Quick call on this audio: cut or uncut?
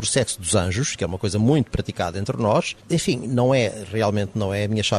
cut